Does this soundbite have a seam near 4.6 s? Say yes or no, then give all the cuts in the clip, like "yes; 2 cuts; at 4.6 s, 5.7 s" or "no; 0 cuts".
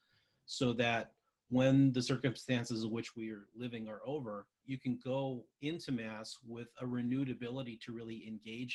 yes; 1 cut; at 4.6 s